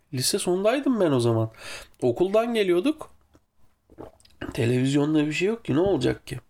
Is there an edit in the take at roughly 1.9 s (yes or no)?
no